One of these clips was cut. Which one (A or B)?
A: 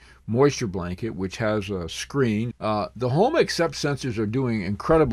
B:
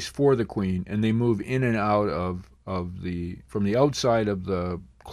A